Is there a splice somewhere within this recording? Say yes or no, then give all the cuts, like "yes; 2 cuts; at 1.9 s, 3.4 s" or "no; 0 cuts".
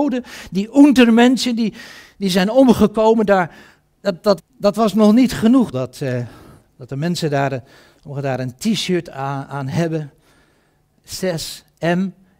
yes; 3 cuts; at 4.4 s, 5.7 s, 11.0 s